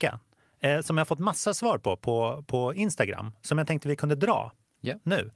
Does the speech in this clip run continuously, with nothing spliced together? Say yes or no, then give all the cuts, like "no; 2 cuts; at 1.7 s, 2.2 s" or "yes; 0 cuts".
yes; 0 cuts